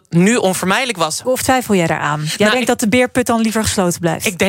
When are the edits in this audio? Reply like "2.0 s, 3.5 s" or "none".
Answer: 1.2 s